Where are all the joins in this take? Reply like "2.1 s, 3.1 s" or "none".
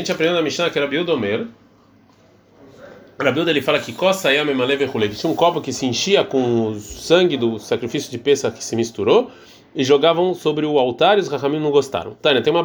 none